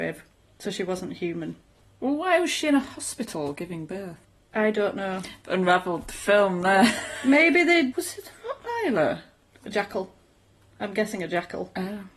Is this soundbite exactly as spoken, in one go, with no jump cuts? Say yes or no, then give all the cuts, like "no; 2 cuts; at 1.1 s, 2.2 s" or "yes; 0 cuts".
no; 1 cut; at 7.9 s